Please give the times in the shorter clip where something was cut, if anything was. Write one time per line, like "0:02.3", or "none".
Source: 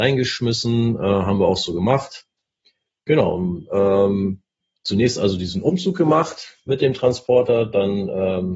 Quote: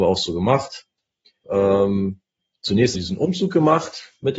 0:01.4
0:02.9